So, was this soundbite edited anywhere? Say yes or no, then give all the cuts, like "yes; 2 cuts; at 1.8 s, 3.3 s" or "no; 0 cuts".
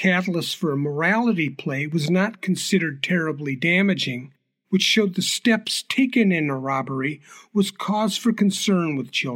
yes; 1 cut; at 4.6 s